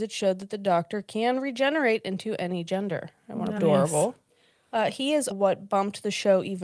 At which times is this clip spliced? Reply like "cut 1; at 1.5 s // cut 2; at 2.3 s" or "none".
cut 1; at 3.6 s // cut 2; at 5.3 s